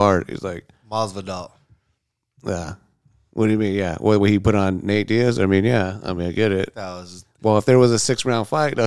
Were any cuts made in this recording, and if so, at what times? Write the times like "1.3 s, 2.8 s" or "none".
none